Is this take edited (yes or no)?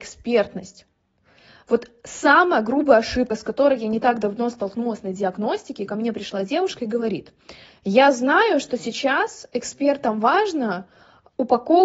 no